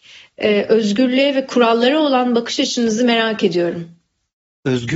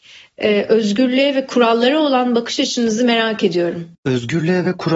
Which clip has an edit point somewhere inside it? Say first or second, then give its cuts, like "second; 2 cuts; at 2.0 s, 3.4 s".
second; 1 cut; at 3.9 s